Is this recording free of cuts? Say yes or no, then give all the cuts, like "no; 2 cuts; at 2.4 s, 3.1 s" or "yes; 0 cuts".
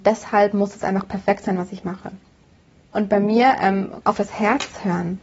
no; 2 cuts; at 2.9 s, 4.0 s